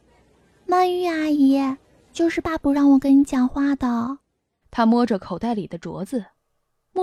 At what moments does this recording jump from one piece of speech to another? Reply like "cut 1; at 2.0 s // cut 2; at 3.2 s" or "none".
cut 1; at 2.4 s // cut 2; at 4.6 s